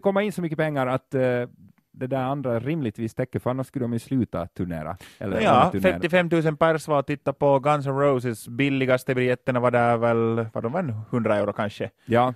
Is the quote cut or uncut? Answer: uncut